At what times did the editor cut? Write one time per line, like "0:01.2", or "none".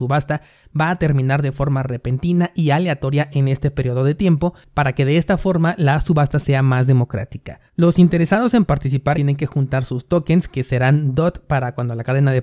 0:07.7
0:09.1